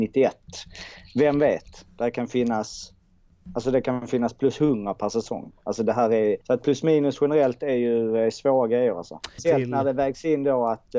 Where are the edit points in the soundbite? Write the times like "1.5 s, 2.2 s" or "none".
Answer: 6.4 s, 9.4 s